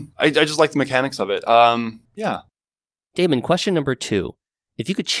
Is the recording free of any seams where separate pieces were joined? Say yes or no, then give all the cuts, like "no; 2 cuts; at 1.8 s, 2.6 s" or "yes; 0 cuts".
yes; 0 cuts